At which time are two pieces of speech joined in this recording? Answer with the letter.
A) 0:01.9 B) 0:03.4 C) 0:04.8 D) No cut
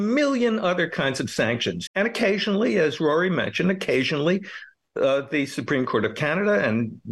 A